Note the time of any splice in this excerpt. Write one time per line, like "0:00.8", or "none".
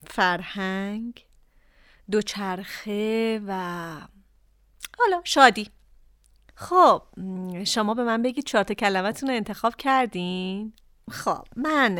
0:06.5

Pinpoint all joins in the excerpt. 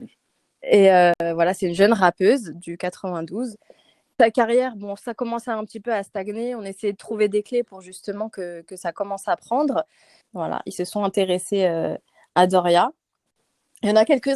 0:10.2

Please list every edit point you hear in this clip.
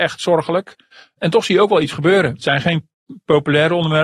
none

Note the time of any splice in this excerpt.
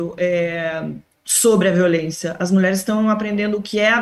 none

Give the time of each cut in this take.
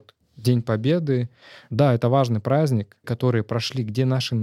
0:03.0

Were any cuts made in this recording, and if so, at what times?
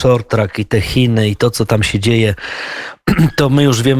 none

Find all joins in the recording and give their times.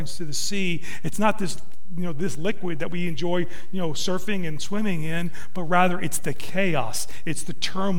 none

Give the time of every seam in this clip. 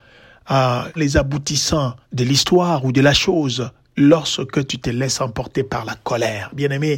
0:01.0
0:02.0

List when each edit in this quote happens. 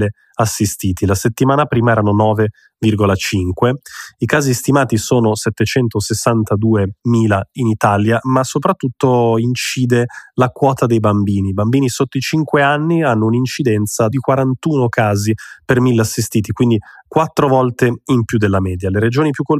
none

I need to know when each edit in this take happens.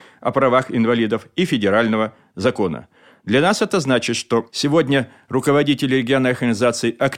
none

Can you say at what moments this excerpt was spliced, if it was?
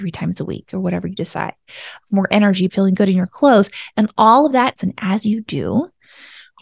0:02.7
0:04.8

